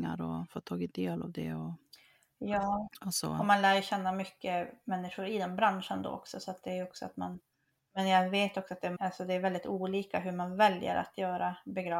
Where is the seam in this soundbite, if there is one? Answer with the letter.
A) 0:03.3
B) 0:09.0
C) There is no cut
B